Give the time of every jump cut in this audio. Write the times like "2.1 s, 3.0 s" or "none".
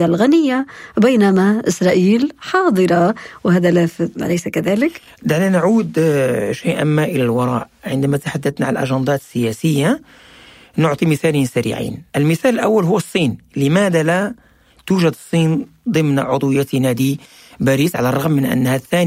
12.1 s